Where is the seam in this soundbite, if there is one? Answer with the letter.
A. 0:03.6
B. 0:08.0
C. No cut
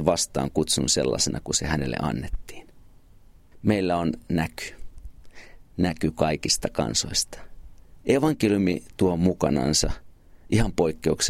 B